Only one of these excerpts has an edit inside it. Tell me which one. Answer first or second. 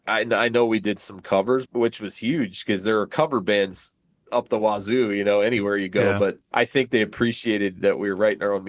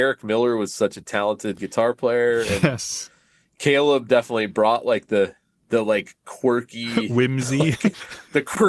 first